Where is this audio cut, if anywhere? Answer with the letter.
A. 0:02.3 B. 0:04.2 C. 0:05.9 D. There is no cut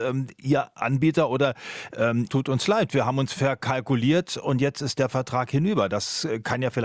A